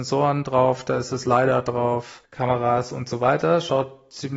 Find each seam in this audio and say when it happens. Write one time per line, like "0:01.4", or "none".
none